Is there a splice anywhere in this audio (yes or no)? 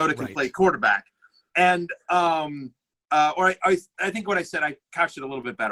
no